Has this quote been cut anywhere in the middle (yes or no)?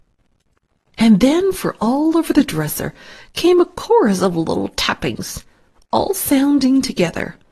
no